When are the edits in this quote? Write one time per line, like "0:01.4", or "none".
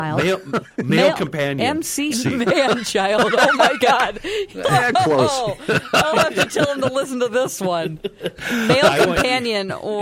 0:02.1